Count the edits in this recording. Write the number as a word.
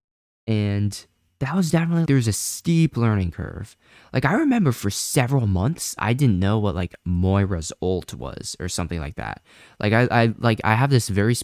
one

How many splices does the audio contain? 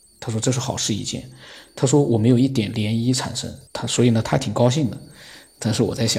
one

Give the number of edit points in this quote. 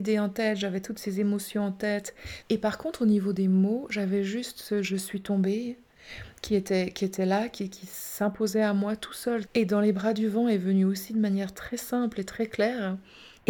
two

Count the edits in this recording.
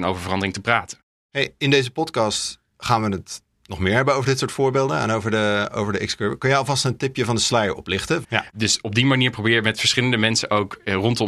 one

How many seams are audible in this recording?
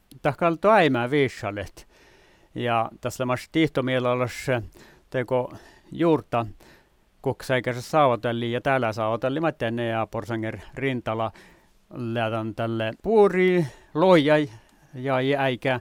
zero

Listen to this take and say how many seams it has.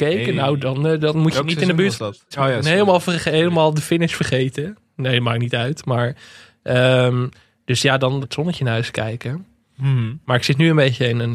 two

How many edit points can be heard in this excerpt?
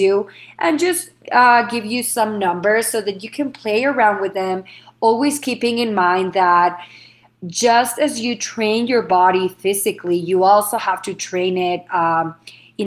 zero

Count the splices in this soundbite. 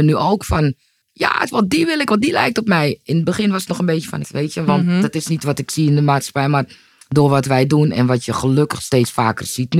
two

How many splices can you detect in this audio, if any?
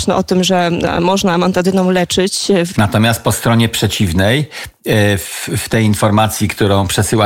one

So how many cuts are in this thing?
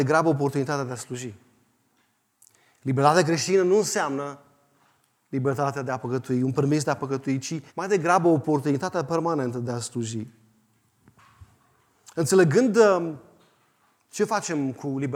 one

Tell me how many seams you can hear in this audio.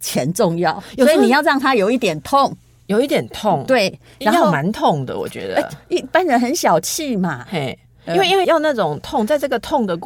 one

